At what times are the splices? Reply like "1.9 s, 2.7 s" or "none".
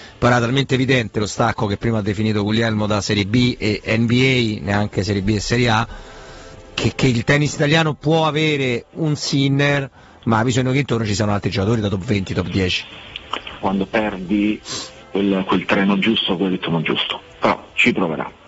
13.6 s